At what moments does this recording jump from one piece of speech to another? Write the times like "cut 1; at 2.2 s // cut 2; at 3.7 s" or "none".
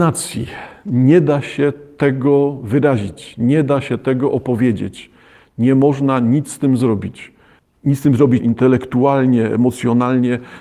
cut 1; at 8.4 s